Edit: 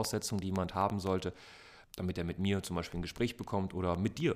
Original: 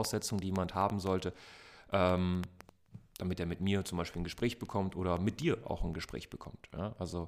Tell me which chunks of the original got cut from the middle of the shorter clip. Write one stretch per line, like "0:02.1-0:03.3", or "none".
0:01.8-0:03.1